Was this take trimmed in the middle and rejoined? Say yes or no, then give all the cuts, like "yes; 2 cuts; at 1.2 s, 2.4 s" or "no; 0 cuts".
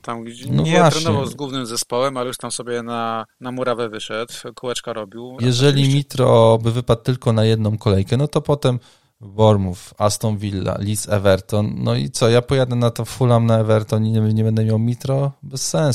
yes; 1 cut; at 5.4 s